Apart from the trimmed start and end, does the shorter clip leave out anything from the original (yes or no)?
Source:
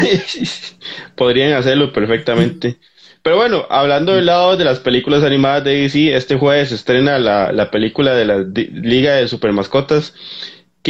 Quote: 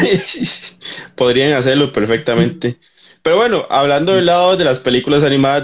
no